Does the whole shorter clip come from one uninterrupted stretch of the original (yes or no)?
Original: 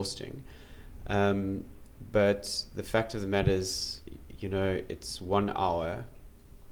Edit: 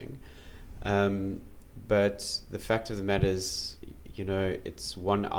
yes